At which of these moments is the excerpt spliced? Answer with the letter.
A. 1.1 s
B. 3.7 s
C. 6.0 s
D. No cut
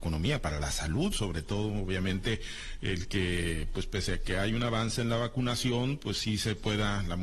D